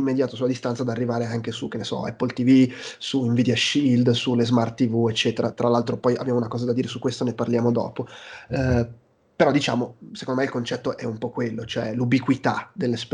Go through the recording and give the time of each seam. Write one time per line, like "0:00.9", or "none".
none